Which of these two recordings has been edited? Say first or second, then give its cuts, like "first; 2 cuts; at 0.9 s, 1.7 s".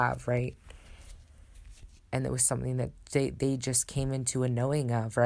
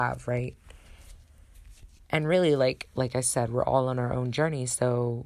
first; 1 cut; at 2.0 s